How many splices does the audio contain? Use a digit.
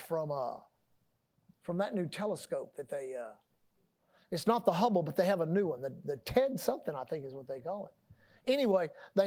0